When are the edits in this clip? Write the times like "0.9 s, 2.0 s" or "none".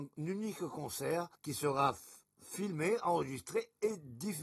1.3 s